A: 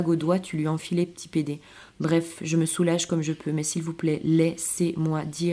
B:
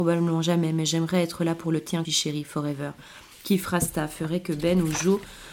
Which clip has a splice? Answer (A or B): B